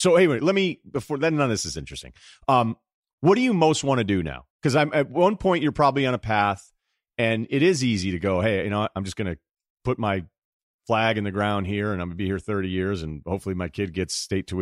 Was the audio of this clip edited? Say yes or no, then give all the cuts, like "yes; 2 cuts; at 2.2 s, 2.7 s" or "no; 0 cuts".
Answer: yes; 1 cut; at 4.5 s